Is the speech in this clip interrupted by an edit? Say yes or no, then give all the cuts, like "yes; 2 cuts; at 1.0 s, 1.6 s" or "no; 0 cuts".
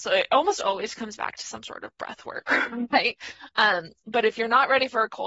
no; 0 cuts